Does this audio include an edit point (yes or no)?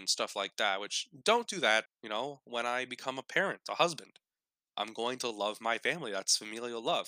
yes